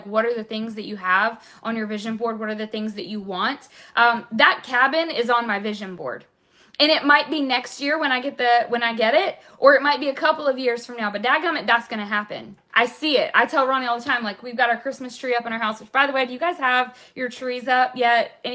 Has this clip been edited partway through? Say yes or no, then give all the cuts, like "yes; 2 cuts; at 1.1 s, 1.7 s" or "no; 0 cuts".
yes; 1 cut; at 12.7 s